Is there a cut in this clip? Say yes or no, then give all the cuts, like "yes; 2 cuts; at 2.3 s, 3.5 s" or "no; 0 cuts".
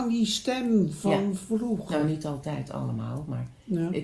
no; 0 cuts